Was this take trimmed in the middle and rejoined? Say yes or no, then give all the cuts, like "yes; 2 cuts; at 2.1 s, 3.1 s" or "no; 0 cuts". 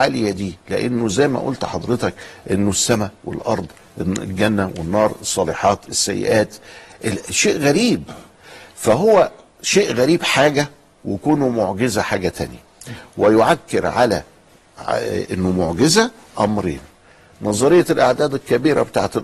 no; 0 cuts